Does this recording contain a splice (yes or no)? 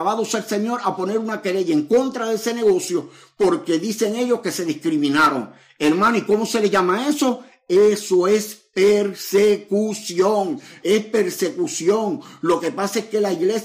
yes